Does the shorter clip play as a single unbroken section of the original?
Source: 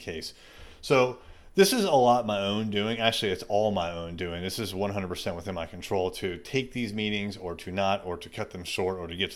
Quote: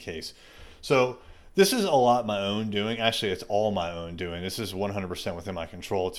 yes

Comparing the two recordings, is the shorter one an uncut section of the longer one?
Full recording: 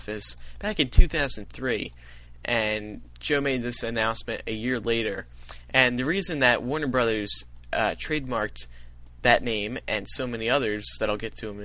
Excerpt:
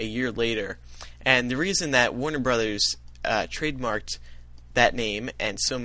yes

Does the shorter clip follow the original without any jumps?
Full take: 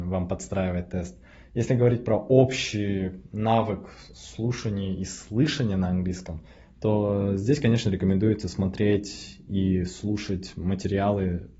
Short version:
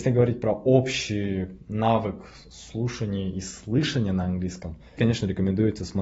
no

